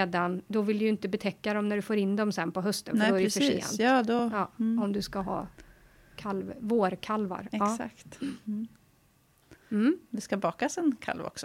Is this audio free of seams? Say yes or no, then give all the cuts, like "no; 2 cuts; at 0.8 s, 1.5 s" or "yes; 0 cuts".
yes; 0 cuts